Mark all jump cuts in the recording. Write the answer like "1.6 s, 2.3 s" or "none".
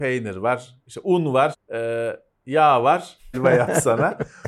1.5 s, 3.3 s